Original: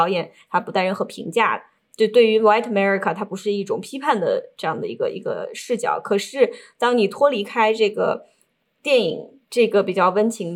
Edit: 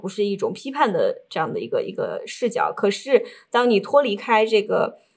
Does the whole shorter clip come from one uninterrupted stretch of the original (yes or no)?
yes